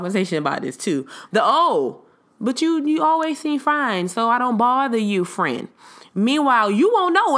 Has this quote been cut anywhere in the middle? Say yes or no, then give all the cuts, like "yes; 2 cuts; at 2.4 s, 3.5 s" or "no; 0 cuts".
yes; 1 cut; at 1.3 s